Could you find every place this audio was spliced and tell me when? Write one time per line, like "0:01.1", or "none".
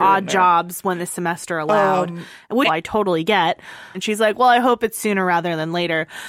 0:02.7
0:03.9